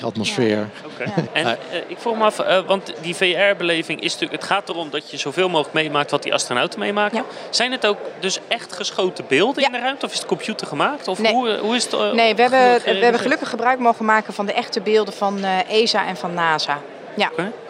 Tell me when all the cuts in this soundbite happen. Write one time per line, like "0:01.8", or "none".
0:01.3